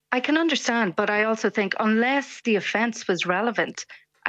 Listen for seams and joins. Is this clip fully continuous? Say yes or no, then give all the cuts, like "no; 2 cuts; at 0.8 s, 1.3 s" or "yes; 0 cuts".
yes; 0 cuts